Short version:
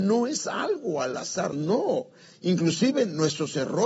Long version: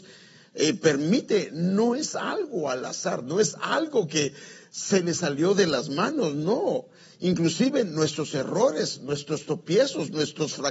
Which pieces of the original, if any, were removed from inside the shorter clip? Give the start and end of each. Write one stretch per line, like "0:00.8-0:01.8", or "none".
0:03.2-0:06.3